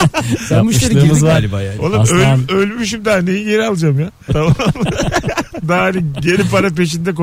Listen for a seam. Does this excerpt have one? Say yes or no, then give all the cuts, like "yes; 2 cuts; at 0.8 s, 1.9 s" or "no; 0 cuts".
yes; 2 cuts; at 4.3 s, 5.6 s